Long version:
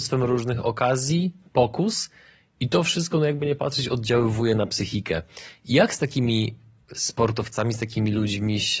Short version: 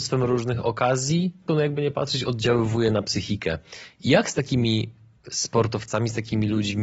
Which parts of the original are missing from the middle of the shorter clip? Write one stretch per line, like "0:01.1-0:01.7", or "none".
0:01.5-0:03.1